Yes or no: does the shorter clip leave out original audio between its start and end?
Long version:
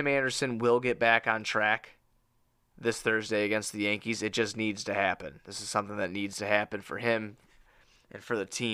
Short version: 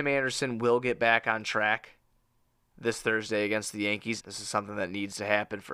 yes